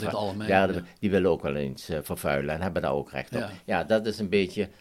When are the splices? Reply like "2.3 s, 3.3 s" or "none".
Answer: none